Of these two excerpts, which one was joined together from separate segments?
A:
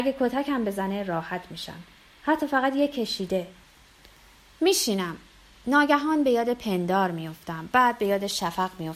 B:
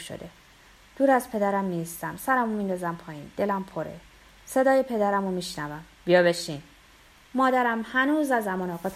B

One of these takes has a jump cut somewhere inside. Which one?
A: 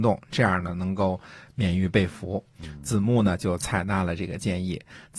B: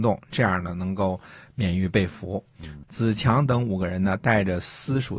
B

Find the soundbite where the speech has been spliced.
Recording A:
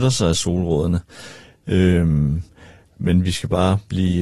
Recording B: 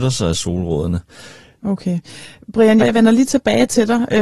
B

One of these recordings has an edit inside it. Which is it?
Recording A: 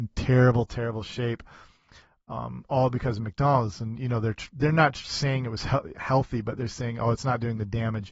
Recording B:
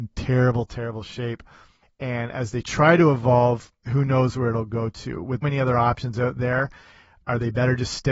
B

